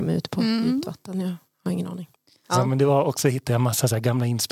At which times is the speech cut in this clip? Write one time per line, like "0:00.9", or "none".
0:02.4